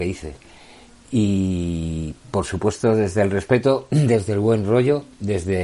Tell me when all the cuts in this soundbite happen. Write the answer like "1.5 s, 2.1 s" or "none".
none